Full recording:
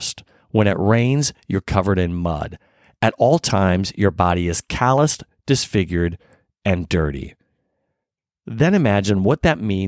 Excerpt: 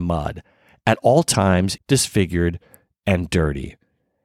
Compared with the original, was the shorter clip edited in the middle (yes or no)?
yes